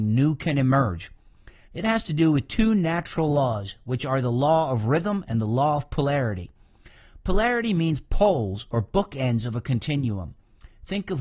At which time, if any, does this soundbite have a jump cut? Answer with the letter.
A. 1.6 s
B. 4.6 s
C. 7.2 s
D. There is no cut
A